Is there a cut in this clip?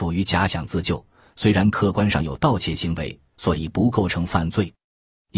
yes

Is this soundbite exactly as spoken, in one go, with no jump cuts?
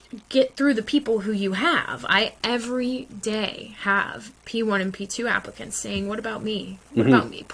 yes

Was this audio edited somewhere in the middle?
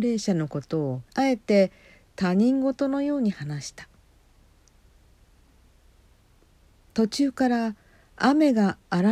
yes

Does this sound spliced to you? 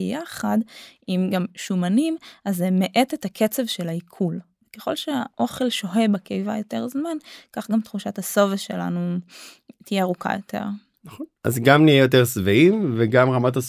no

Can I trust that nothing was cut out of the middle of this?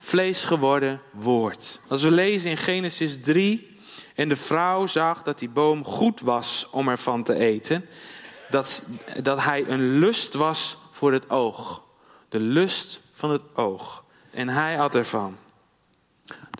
no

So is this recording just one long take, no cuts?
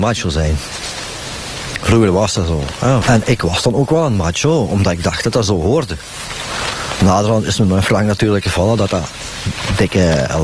no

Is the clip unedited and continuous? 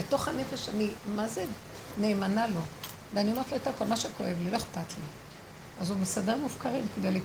no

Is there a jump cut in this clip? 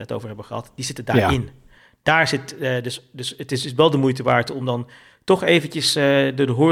no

